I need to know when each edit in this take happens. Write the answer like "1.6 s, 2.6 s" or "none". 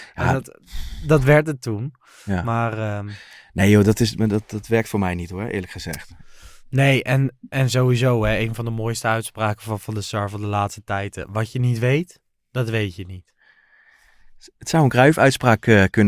none